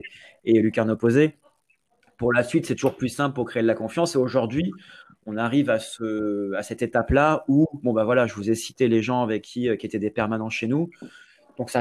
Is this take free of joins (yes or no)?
yes